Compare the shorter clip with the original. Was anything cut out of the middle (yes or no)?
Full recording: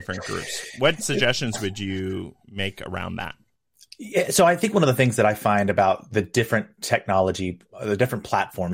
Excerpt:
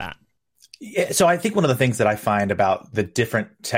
no